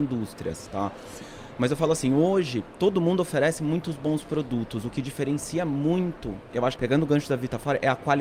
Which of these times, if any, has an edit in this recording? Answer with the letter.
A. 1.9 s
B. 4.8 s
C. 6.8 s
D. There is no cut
C